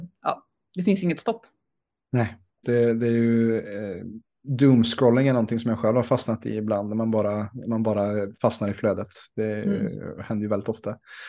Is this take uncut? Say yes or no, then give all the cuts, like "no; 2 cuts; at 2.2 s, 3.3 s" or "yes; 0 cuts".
no; 1 cut; at 2.6 s